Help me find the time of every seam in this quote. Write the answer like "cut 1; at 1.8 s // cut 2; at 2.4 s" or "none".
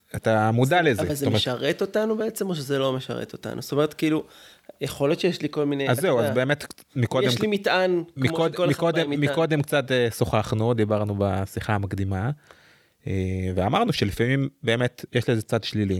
cut 1; at 15.1 s